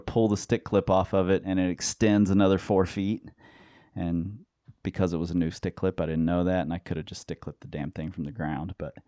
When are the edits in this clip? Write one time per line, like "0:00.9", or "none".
none